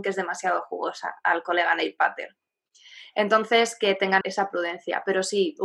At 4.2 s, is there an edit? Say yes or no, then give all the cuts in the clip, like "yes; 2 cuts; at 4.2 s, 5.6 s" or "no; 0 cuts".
yes; 1 cut; at 4.2 s